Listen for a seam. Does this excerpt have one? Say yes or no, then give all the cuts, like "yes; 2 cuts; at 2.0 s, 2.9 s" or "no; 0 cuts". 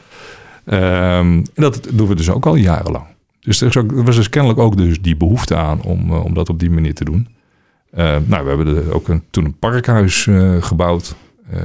no; 0 cuts